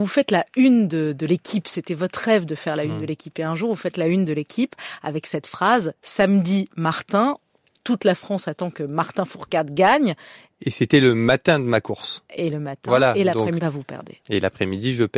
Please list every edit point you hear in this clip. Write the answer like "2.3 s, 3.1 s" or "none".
13.6 s